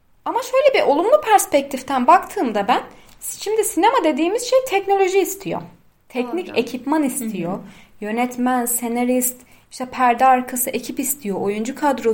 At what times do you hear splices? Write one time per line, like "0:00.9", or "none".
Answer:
none